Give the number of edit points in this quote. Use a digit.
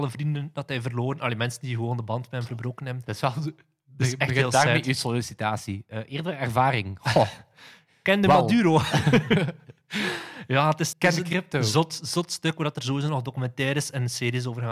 1